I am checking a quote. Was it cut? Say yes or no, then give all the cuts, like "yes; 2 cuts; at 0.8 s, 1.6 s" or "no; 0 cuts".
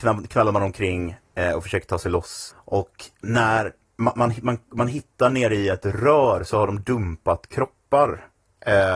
yes; 1 cut; at 2.5 s